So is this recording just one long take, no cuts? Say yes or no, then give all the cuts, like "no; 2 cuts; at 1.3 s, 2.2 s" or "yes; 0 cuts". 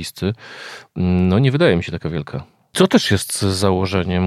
no; 1 cut; at 2.7 s